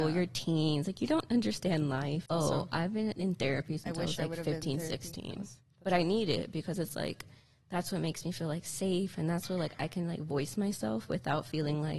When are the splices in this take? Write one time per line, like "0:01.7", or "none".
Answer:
0:02.3